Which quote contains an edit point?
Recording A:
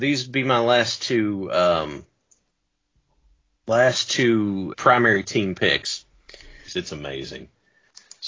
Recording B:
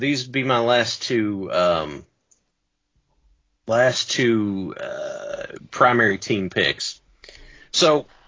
A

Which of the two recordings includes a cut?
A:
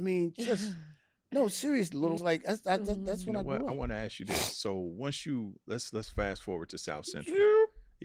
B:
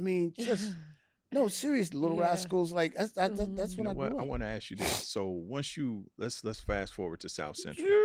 A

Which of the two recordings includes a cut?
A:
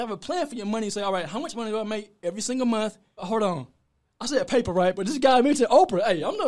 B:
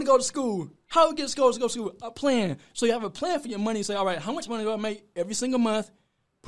A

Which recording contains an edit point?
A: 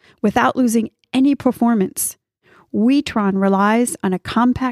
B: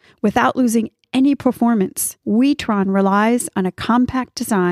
B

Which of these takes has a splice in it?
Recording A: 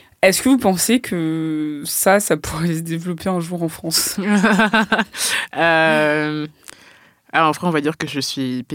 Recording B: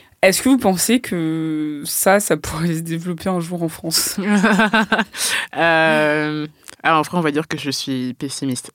B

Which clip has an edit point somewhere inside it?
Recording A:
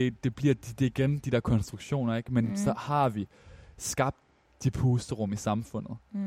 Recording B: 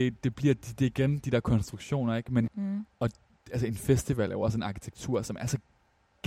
B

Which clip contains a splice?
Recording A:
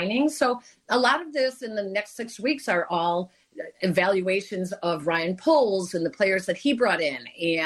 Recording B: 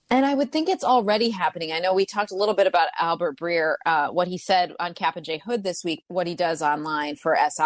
B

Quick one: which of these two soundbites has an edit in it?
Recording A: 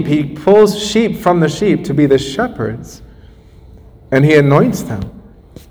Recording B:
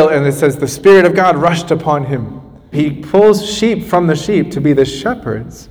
B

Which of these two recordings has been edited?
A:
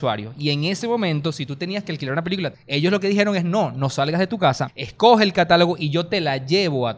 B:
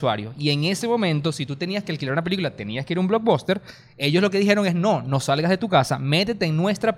A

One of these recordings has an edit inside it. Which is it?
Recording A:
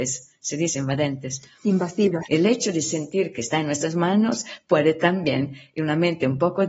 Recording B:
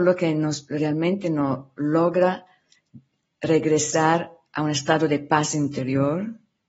A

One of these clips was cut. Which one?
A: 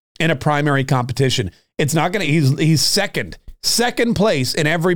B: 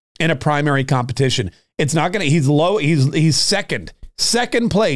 A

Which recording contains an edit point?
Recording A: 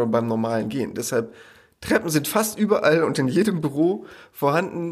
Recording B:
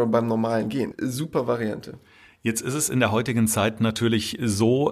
B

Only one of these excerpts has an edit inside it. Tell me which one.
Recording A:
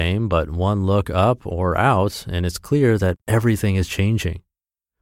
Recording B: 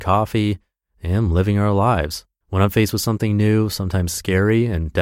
B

